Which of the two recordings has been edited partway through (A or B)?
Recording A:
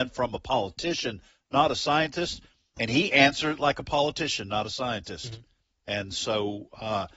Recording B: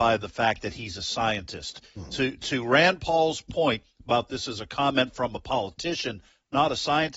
A